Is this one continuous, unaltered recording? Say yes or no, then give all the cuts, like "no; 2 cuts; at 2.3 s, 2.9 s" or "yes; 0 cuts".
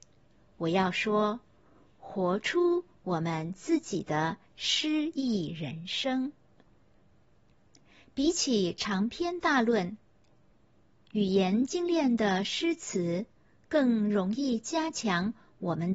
yes; 0 cuts